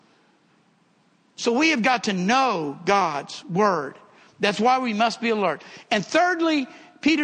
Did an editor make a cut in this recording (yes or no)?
no